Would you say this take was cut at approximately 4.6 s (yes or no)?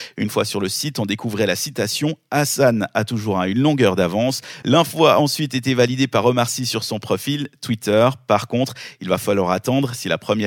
yes